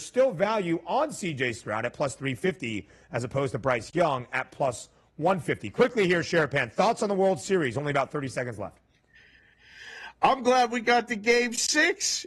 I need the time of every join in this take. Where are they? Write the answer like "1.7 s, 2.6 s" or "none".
none

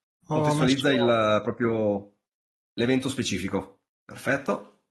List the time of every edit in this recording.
3.9 s

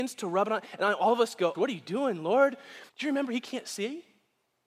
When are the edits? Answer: 1.5 s, 2.9 s

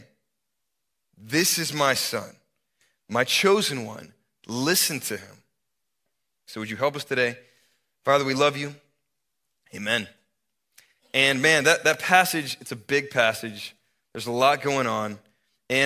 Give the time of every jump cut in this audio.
6.5 s

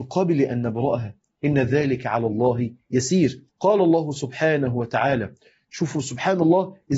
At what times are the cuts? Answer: 3.5 s

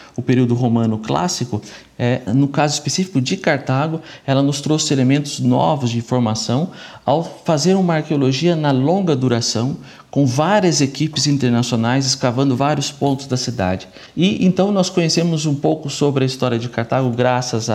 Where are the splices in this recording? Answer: 2.3 s

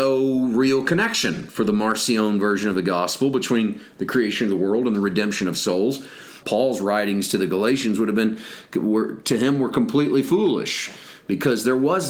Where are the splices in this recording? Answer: 6.4 s

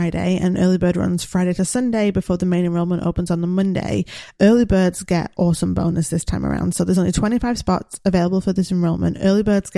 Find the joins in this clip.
none

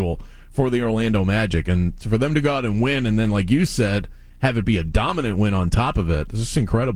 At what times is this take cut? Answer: none

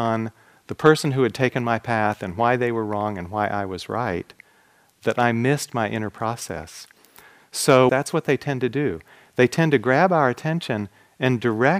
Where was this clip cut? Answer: 7.9 s

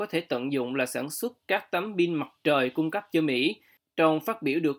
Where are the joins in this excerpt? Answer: 3.8 s

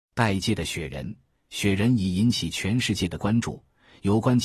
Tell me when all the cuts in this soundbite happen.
none

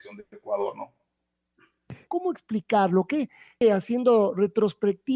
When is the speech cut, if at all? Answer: 2.1 s, 3.6 s

